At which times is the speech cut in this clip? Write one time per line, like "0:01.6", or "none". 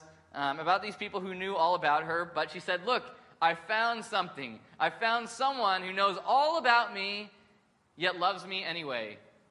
none

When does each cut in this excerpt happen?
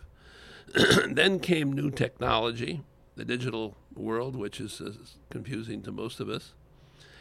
none

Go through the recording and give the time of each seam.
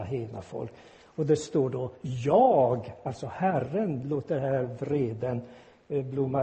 none

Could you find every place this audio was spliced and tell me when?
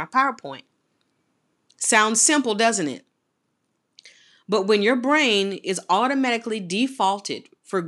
none

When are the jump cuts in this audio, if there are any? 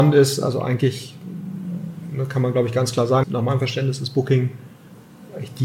0:03.2

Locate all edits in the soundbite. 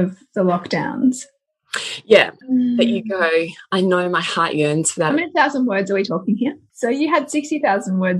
0:02.4
0:05.1
0:06.7

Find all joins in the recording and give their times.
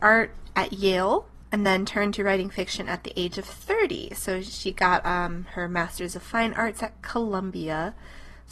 none

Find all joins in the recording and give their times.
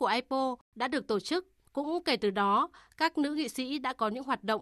0:01.6

